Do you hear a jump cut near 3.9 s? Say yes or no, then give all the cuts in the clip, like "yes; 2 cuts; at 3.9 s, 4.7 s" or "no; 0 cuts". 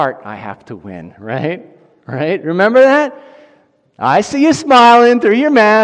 no; 0 cuts